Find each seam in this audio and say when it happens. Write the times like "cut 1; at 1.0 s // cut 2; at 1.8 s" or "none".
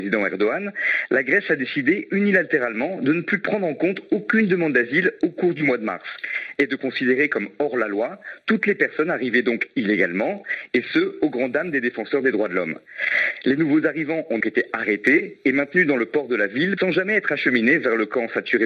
cut 1; at 14.4 s // cut 2; at 16.8 s